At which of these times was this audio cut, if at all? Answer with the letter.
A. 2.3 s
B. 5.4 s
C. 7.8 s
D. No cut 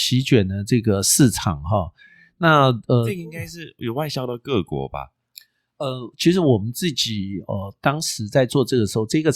D